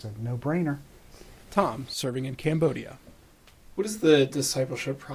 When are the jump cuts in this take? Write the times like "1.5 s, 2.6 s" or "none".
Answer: none